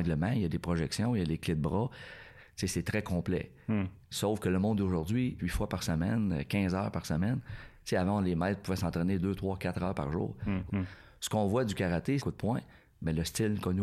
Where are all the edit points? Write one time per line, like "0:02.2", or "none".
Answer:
0:05.4
0:10.7
0:12.2